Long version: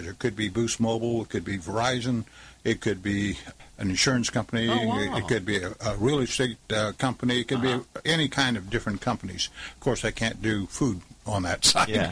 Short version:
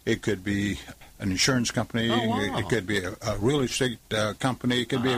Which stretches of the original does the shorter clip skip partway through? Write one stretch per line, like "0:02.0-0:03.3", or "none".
none